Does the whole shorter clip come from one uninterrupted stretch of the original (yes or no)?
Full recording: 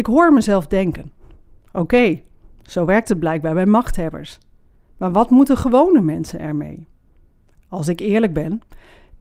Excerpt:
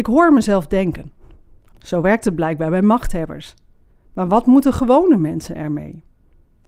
no